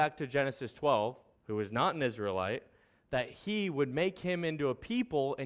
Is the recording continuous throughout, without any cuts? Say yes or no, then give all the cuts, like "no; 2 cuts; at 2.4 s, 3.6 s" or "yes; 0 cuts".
no; 1 cut; at 1.4 s